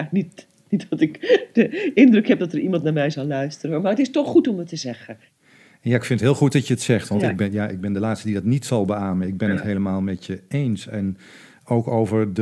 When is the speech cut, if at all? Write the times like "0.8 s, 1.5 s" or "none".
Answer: none